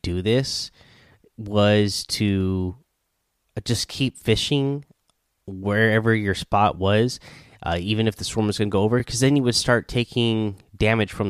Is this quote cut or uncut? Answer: uncut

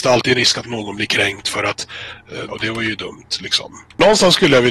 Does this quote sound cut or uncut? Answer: cut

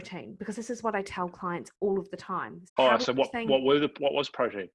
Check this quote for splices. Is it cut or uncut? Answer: cut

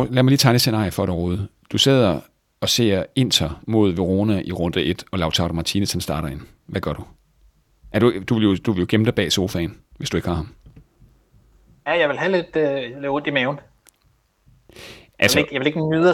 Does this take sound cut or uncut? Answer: uncut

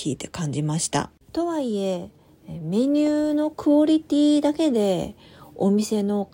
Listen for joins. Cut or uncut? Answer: cut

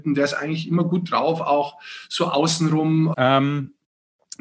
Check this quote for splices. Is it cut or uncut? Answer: cut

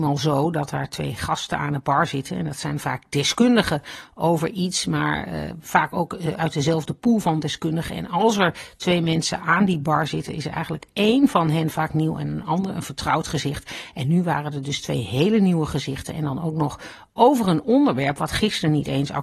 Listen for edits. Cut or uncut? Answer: uncut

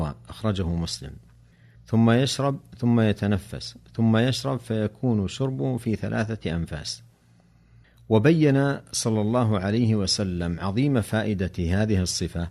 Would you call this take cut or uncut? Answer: cut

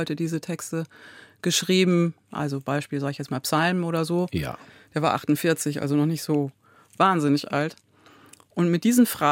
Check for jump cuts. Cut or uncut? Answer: cut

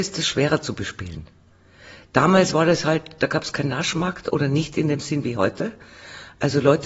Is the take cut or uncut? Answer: uncut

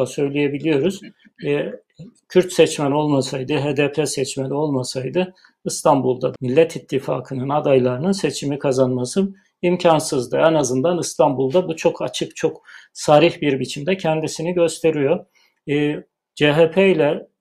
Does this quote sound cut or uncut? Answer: cut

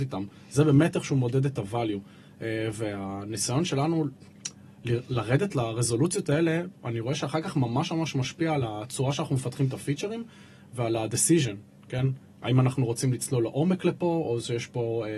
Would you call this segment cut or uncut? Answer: uncut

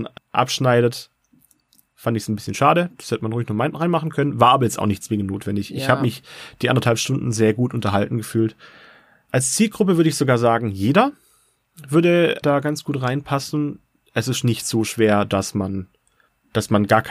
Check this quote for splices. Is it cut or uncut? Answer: uncut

